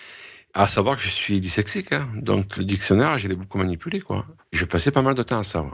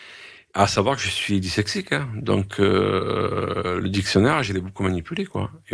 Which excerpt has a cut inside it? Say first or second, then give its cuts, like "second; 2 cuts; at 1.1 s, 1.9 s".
first; 2 cuts; at 2.6 s, 4.4 s